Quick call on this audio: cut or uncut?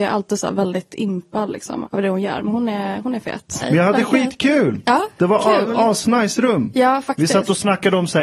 cut